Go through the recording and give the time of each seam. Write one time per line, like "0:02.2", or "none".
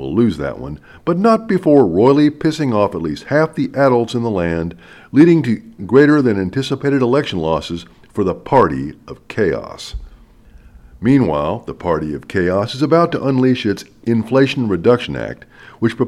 0:05.8

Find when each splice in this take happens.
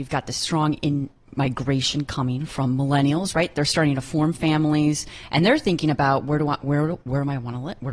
none

